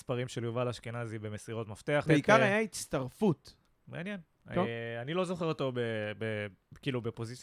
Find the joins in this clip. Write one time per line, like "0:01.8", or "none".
0:02.1
0:03.7